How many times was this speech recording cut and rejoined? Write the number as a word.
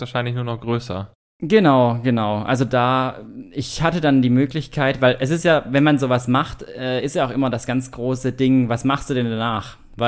zero